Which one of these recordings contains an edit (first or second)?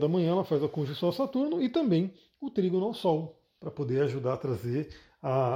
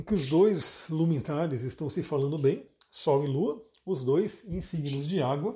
first